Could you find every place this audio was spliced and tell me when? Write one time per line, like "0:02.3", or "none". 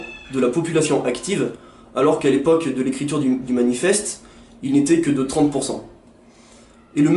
none